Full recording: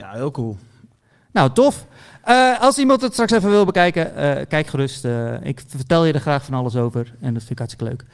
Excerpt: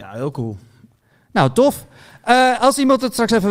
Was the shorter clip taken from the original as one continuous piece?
yes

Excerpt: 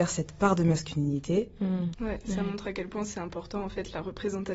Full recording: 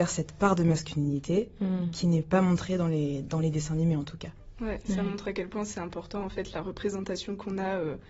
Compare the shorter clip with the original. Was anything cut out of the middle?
yes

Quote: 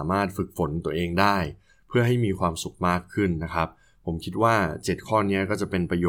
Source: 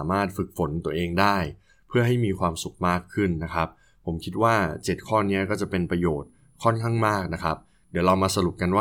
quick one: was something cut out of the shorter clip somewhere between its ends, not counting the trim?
no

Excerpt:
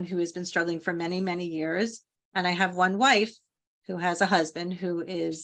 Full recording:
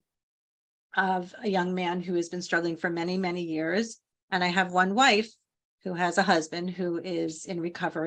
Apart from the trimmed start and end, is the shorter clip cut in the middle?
no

